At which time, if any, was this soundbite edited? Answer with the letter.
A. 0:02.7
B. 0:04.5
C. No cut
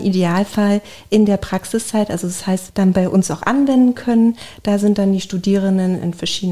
A